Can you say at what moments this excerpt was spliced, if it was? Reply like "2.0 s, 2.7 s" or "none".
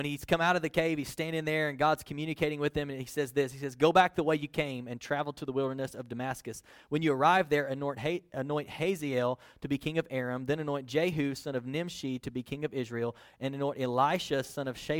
none